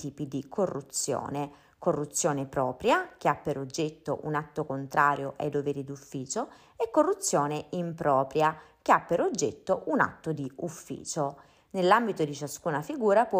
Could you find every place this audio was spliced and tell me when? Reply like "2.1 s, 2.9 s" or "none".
none